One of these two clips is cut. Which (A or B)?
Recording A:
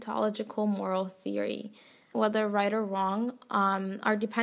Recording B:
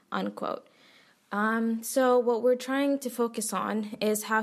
A